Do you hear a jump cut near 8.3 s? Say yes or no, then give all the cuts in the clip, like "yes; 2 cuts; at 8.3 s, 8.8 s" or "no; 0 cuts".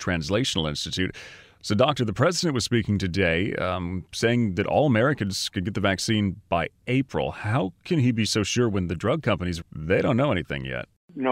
no; 1 cut; at 9.6 s